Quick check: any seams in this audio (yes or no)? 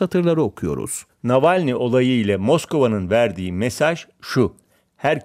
yes